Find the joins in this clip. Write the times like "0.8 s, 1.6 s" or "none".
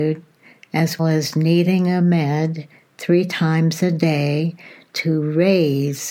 1.0 s